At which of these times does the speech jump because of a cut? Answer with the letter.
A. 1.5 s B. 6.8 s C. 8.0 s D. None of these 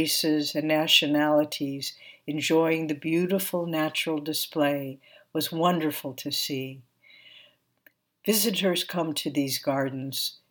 D